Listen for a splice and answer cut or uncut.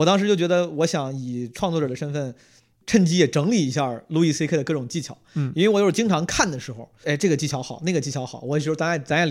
cut